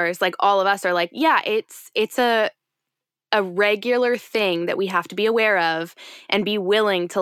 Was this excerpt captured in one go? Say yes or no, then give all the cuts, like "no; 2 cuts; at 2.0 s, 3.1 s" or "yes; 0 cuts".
yes; 0 cuts